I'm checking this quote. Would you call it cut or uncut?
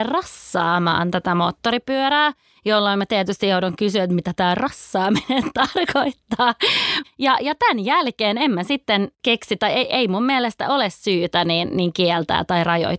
cut